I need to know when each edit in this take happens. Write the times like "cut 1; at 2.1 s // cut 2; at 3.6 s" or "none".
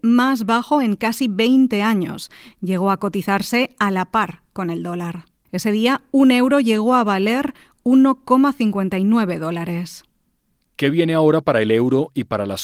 cut 1; at 5.5 s